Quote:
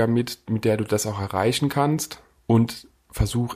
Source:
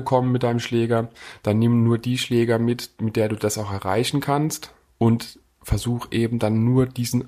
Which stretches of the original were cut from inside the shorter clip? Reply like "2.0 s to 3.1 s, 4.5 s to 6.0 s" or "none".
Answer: none